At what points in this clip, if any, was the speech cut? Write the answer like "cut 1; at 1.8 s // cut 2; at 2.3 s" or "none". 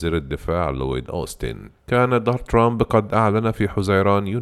cut 1; at 1.8 s